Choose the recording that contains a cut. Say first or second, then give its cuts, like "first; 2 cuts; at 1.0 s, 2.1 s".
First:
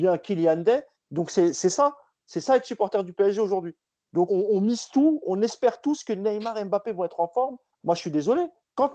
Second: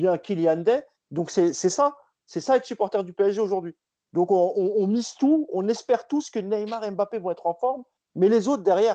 first; 2 cuts; at 4.3 s, 7.7 s